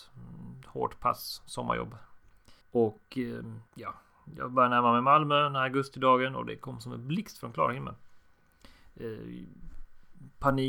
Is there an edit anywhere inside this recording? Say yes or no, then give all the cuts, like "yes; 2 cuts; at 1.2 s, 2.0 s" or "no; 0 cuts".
yes; 2 cuts; at 2.6 s, 3.7 s